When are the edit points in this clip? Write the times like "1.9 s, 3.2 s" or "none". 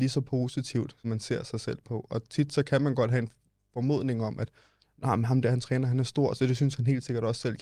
1.0 s